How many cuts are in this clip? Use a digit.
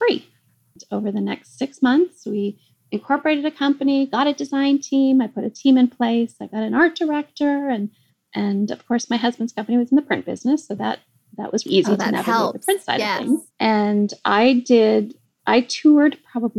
2